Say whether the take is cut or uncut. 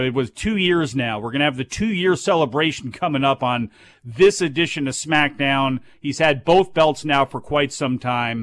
uncut